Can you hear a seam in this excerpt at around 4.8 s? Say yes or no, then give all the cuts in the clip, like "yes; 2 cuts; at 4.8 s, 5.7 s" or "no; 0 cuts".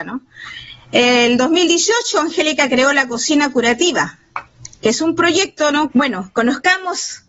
yes; 2 cuts; at 4.8 s, 5.9 s